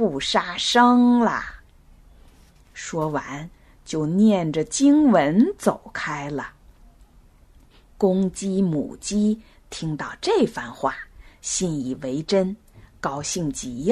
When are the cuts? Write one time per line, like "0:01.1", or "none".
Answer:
none

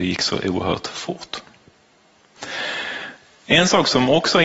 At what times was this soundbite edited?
none

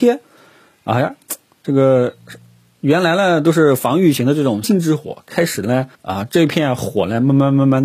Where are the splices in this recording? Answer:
0:04.6
0:05.9

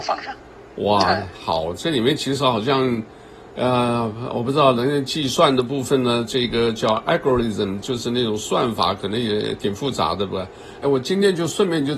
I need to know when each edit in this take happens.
0:10.8

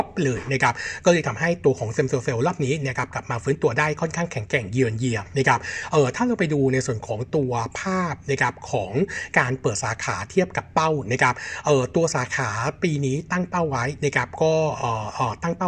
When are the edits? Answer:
none

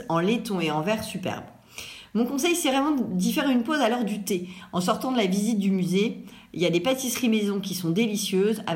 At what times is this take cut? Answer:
none

